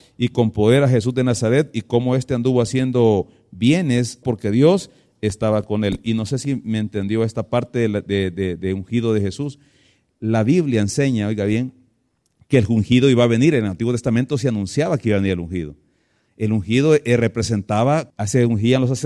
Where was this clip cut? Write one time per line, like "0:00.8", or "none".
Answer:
0:04.2
0:18.1

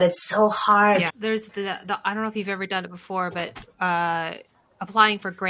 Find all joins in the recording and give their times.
0:01.1

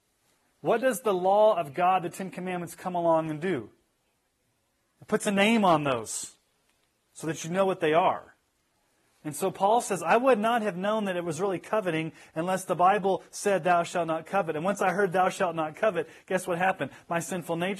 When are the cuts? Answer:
none

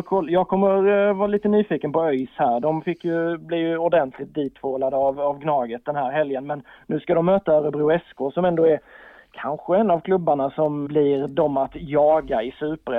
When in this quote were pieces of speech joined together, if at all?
0:10.9

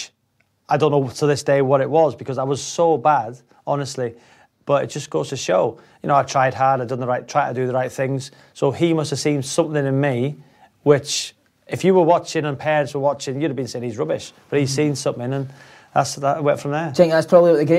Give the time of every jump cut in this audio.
none

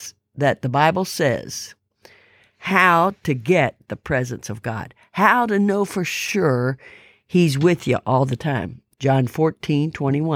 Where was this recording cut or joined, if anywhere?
0:08.9

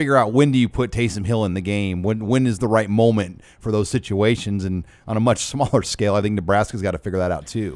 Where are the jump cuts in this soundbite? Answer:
none

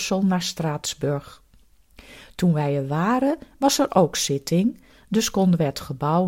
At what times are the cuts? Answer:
none

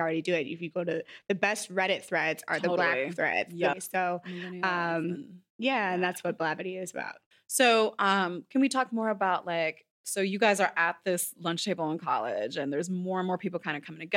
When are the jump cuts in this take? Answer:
0:03.7

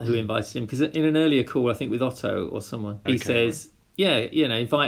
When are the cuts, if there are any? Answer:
0:03.1

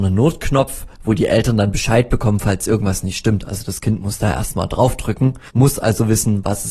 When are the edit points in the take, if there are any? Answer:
0:05.5

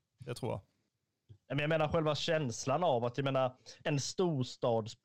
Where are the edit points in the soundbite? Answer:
0:03.8

